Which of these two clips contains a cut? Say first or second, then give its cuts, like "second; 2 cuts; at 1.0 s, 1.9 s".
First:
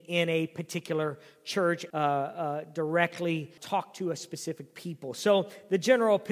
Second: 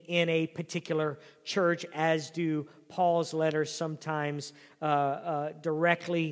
first; 2 cuts; at 1.9 s, 3.6 s